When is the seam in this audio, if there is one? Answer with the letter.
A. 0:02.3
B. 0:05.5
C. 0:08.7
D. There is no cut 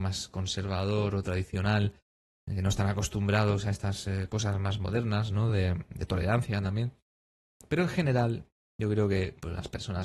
D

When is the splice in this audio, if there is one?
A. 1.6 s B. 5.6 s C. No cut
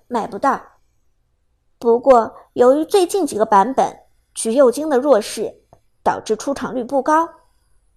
A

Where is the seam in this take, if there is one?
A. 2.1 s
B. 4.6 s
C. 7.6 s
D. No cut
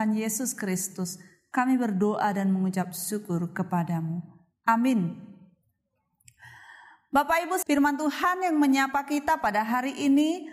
C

